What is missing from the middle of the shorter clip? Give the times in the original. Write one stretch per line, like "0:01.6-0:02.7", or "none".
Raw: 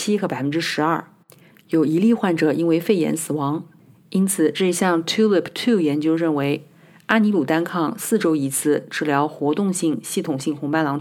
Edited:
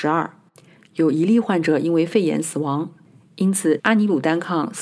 0:04.5-0:07.0